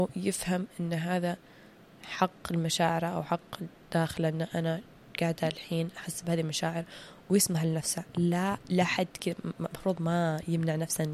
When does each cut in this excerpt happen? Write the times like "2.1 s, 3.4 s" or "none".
none